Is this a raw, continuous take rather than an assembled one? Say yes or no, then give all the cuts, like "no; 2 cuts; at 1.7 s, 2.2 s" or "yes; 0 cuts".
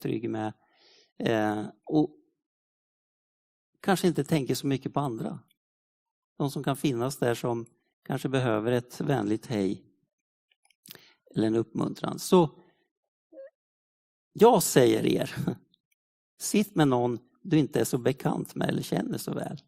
yes; 0 cuts